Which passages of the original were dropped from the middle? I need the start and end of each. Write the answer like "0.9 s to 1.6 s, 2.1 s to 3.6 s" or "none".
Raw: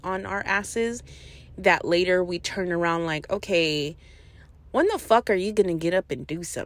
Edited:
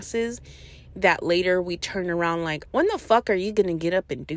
3.3 s to 4.7 s